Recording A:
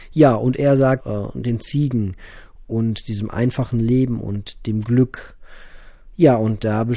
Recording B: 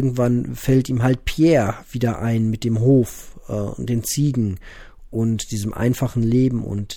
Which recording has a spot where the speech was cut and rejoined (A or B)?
A